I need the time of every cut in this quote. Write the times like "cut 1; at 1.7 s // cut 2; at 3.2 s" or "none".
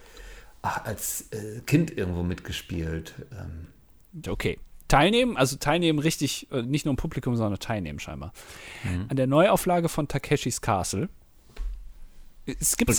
cut 1; at 4.2 s